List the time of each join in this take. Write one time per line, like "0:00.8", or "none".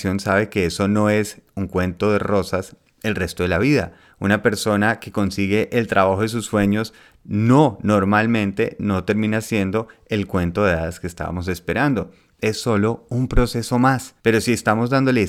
0:14.2